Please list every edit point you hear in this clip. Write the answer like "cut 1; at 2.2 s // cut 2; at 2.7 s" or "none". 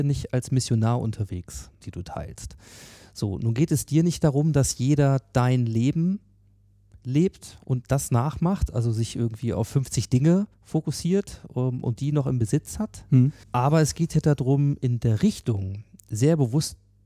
cut 1; at 1.8 s // cut 2; at 10.5 s // cut 3; at 13.4 s